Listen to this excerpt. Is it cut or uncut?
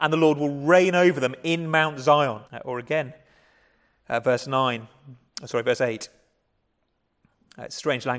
cut